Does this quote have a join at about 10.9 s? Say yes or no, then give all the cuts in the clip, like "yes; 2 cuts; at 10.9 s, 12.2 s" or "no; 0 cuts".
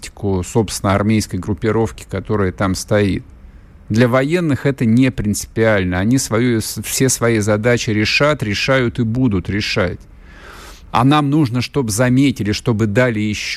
yes; 1 cut; at 10.9 s